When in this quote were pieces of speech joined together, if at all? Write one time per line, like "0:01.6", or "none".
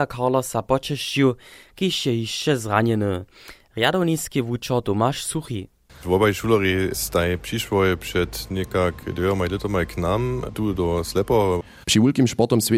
0:11.8